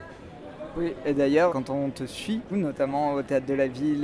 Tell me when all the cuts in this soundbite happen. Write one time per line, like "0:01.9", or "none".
0:01.5
0:02.5